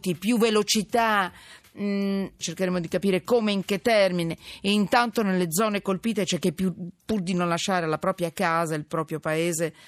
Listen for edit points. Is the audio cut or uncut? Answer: cut